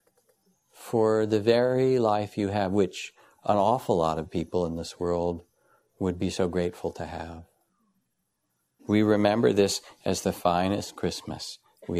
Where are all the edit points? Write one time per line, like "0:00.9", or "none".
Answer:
0:08.8